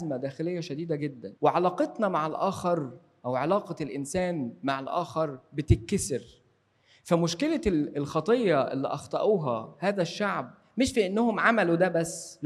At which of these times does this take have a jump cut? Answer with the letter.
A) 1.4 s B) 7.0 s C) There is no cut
A